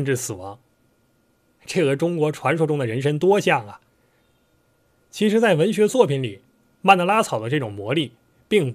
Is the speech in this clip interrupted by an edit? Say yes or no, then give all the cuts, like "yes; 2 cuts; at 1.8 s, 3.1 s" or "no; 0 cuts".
no; 0 cuts